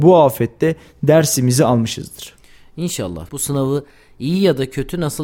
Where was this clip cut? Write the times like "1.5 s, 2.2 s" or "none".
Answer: 3.3 s